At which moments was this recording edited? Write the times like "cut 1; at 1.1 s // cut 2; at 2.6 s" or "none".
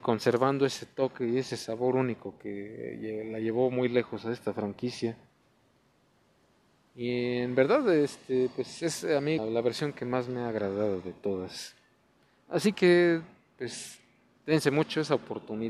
cut 1; at 9.4 s